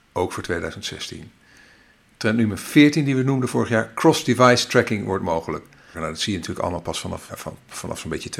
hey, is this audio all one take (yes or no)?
no